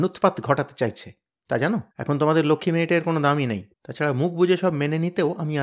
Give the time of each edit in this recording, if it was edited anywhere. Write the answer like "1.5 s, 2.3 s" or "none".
1.9 s, 3.7 s

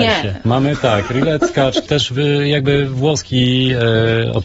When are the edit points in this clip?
1.9 s

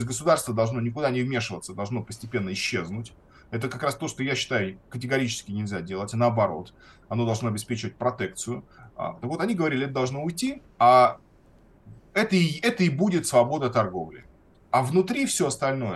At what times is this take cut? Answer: 10.7 s

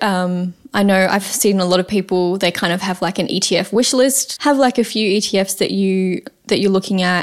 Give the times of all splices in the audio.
4.4 s

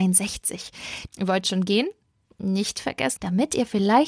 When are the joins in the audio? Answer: 1.1 s, 3.2 s

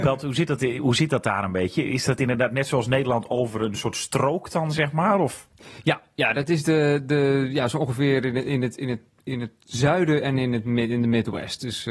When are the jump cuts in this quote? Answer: none

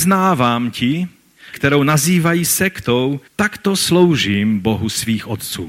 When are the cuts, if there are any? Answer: 1.5 s, 3.3 s

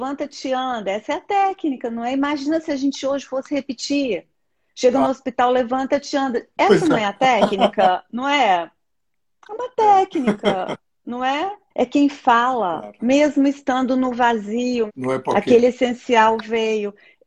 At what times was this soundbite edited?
11.7 s, 13.0 s, 14.9 s

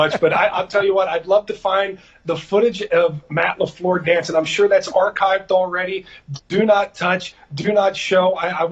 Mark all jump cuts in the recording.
none

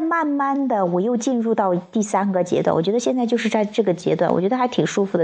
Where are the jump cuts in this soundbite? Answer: none

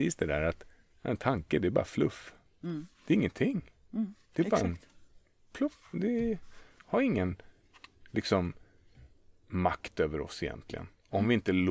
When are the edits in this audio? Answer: 2.9 s

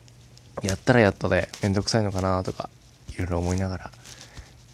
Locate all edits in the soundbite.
none

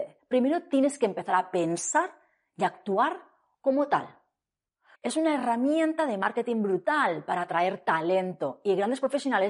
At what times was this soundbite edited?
4.9 s

